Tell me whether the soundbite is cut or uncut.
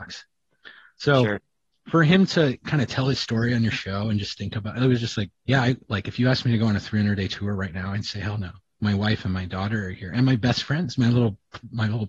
uncut